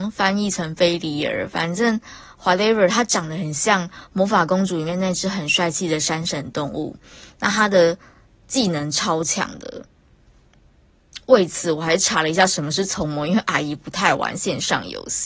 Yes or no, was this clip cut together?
no